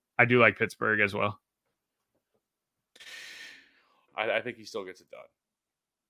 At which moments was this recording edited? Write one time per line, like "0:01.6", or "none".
0:04.1